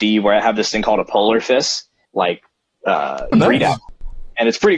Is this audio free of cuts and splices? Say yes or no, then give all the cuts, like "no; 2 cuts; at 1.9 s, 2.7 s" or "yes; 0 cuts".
no; 2 cuts; at 2.1 s, 3.3 s